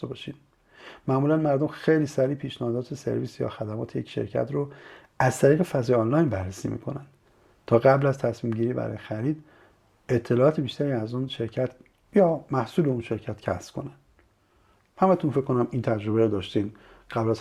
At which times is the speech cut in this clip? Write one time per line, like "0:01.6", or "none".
none